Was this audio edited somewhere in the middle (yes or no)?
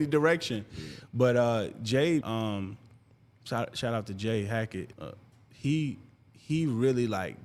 yes